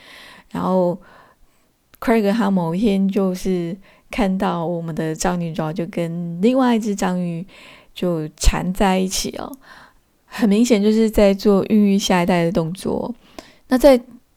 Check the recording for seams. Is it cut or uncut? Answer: uncut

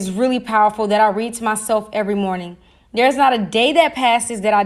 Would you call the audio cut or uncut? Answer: uncut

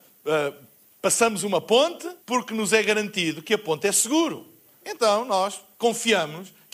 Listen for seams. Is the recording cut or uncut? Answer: cut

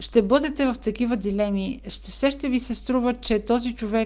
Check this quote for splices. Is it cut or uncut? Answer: uncut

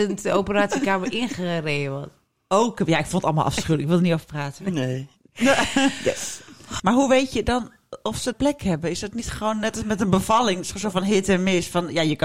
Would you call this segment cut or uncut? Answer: cut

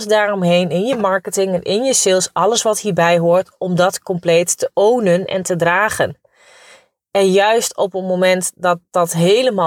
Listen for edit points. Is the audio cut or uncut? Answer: uncut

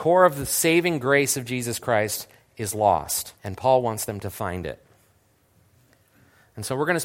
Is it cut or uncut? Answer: cut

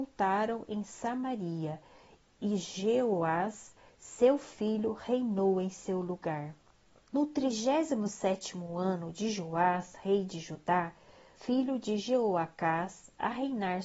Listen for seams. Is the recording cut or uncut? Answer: cut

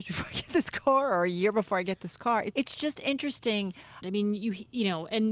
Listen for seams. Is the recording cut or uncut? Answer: cut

